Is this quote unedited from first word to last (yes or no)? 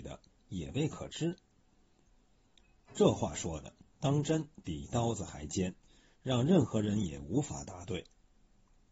yes